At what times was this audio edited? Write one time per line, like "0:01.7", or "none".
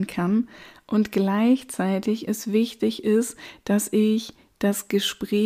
none